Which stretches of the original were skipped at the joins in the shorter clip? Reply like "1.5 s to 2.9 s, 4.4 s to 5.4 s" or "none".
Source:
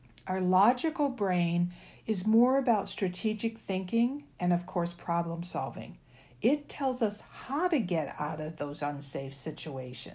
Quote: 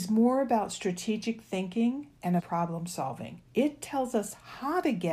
4.6 s to 5.0 s, 6.0 s to 6.3 s